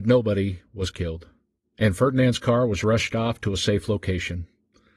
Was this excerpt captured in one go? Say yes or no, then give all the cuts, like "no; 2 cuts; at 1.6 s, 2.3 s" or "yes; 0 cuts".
yes; 0 cuts